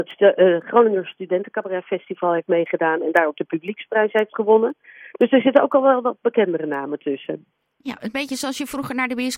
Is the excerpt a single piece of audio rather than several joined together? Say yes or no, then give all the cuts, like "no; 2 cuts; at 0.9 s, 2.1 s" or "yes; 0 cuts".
yes; 0 cuts